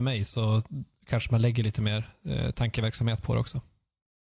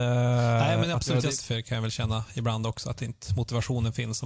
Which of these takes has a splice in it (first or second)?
second